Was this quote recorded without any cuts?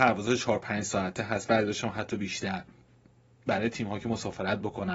yes; 0 cuts

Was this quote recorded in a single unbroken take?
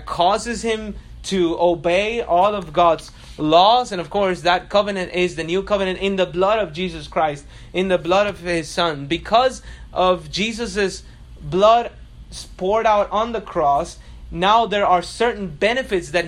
yes; 0 cuts

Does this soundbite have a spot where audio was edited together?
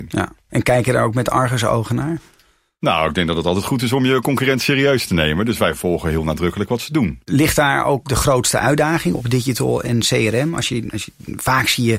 no; 0 cuts

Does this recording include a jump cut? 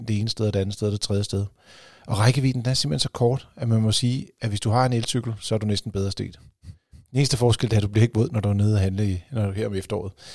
no; 0 cuts

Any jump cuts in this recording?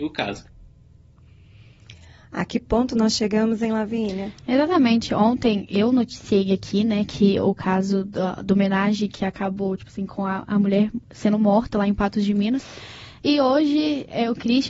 no; 0 cuts

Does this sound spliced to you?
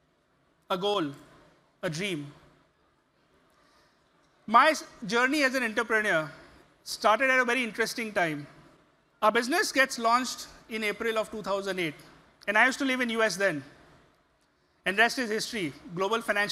yes; 2 cuts; at 1.6 s, 9.1 s

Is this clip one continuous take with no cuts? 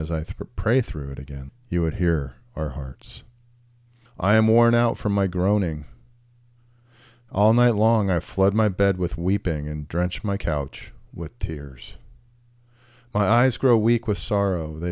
no; 2 cuts; at 1.5 s, 4.1 s

